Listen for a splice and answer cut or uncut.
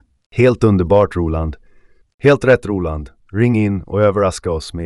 cut